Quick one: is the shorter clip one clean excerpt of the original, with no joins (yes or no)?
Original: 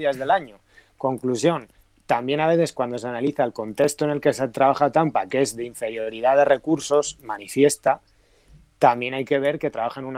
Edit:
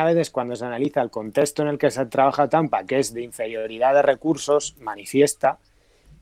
yes